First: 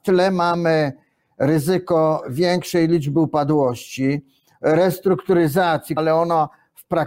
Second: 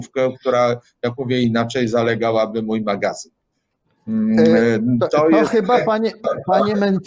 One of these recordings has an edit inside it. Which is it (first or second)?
first